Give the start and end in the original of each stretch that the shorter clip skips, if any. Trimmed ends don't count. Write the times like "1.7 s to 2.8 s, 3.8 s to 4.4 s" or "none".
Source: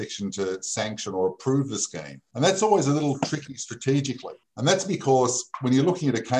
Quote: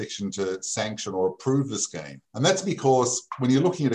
2.2 s to 4.5 s